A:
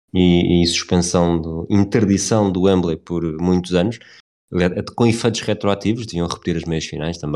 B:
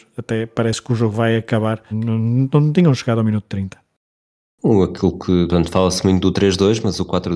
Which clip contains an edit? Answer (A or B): B